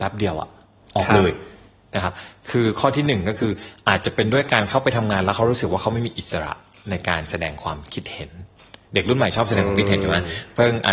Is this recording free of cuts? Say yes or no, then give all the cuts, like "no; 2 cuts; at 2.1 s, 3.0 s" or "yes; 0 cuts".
yes; 0 cuts